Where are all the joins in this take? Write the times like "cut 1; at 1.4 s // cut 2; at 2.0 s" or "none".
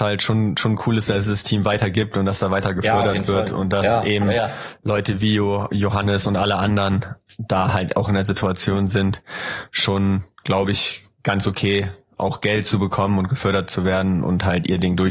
cut 1; at 10.3 s

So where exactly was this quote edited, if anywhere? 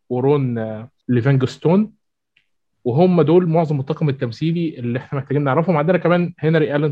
none

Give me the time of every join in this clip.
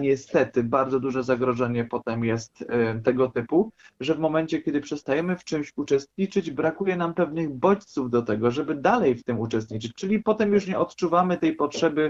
none

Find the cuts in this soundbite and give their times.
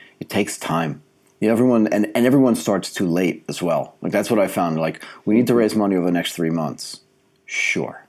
none

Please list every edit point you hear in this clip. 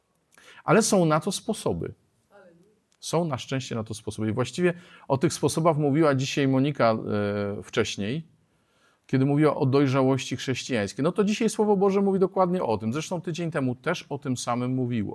none

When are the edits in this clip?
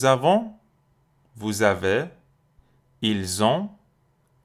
none

